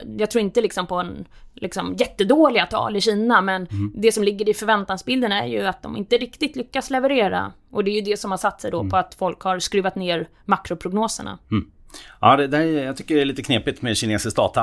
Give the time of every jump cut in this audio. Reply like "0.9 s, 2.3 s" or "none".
none